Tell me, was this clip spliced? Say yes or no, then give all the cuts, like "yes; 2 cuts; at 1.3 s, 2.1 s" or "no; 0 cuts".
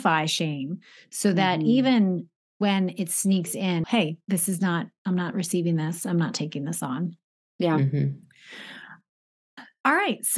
yes; 1 cut; at 3.8 s